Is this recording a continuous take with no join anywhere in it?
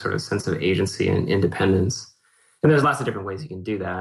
yes; 0 cuts

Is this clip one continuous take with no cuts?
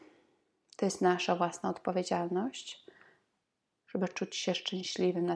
no; 1 cut; at 3.7 s

